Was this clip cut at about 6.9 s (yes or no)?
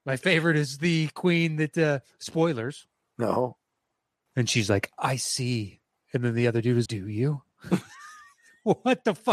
yes